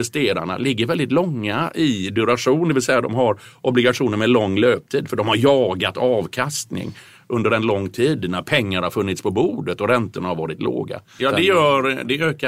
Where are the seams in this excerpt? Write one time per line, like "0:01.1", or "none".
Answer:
0:11.2